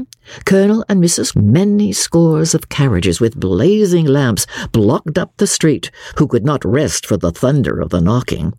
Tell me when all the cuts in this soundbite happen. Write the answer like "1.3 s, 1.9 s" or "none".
1.3 s, 6.1 s